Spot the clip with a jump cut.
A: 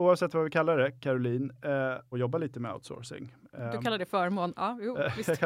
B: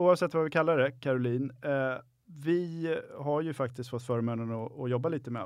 A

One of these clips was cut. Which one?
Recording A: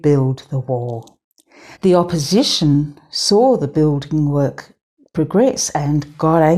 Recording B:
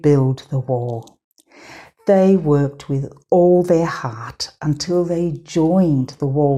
A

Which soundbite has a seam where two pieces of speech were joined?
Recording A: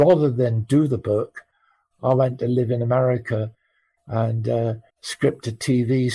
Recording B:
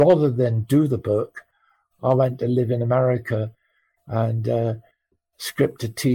A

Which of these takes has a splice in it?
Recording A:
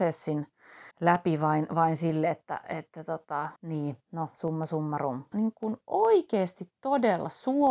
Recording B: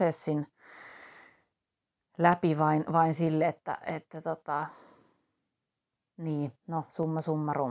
A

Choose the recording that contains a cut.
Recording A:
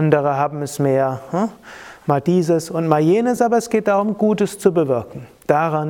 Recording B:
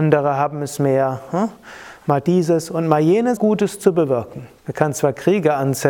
B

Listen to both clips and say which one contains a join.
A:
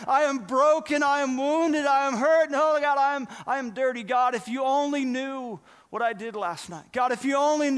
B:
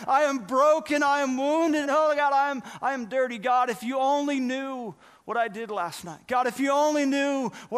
B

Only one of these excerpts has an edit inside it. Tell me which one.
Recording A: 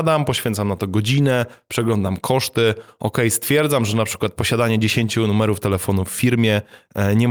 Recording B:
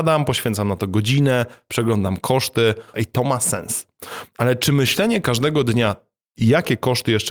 B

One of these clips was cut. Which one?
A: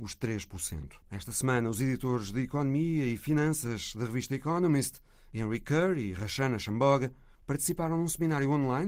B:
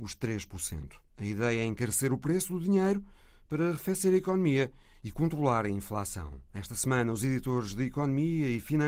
A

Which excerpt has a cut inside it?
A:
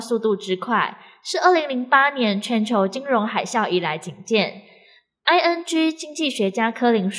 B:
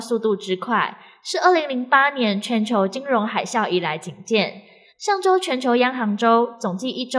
B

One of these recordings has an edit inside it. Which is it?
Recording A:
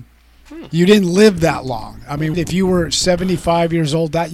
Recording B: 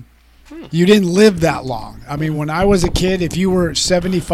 A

